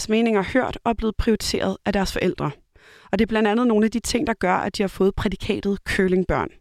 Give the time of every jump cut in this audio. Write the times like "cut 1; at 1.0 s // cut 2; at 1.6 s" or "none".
none